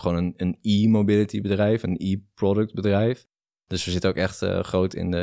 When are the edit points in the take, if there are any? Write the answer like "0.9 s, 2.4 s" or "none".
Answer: none

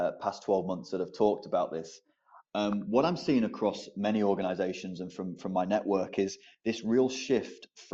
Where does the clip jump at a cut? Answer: none

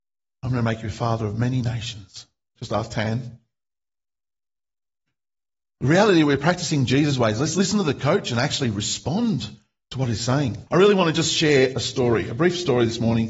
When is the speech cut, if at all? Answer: 2.6 s, 10.7 s

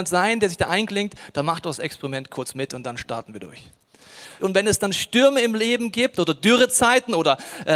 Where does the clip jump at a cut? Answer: 4.4 s

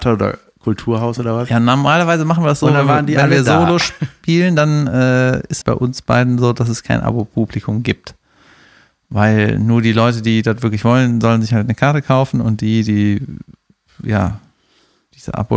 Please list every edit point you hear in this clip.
5.6 s

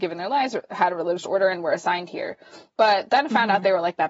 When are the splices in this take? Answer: none

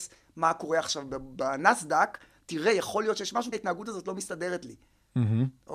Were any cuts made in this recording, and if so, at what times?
3.5 s

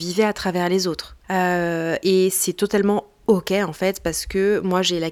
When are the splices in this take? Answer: 1.2 s

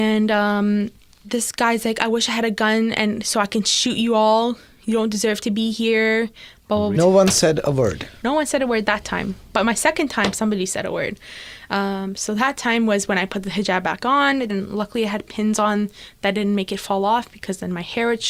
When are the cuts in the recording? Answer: 7.0 s, 14.5 s

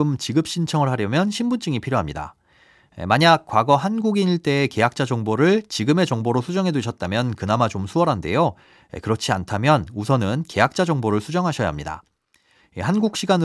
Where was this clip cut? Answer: none

